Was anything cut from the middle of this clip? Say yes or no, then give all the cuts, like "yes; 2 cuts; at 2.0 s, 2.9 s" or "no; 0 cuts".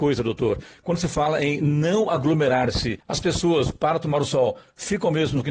no; 0 cuts